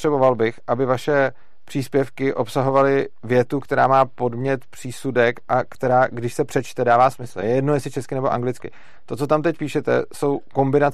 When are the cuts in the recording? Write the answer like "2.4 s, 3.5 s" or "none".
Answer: none